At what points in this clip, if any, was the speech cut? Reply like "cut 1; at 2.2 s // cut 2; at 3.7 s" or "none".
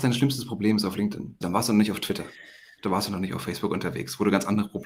cut 1; at 1.4 s